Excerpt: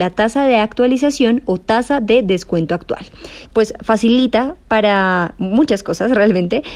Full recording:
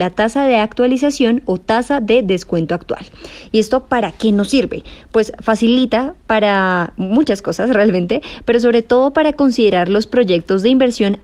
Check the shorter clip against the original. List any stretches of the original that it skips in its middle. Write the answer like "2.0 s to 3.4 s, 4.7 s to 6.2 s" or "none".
3.5 s to 5.0 s